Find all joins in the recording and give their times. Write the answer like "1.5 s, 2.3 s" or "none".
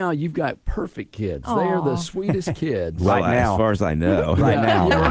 none